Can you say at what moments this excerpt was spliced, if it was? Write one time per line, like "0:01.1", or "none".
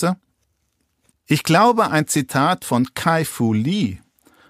0:01.1